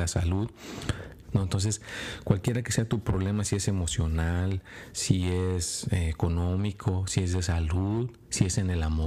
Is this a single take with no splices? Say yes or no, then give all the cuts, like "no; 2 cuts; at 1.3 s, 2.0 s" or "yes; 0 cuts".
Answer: no; 1 cut; at 1.2 s